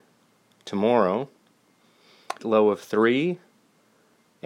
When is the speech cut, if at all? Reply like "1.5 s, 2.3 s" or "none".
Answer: 2.4 s